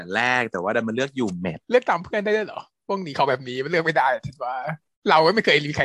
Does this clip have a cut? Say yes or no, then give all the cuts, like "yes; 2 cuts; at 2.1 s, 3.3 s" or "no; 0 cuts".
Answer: yes; 1 cut; at 1.6 s